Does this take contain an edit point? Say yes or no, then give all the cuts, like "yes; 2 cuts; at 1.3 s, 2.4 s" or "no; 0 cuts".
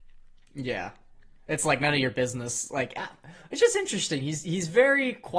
no; 0 cuts